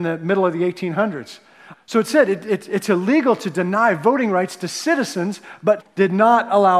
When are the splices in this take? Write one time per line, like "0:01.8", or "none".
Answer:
0:01.7
0:05.8